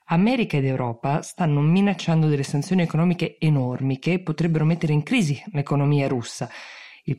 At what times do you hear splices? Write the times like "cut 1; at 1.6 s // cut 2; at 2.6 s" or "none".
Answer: none